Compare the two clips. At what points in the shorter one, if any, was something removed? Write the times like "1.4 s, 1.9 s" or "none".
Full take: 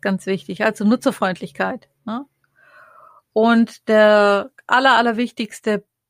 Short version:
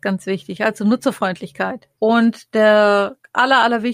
1.9 s